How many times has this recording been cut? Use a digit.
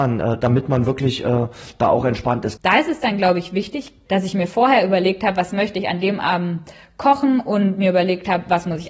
2